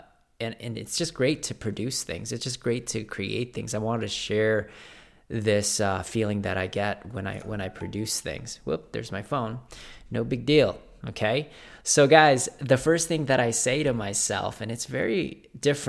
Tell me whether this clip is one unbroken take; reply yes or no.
yes